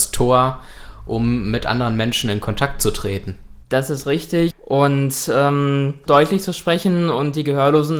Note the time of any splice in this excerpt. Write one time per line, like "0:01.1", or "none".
0:04.5
0:06.1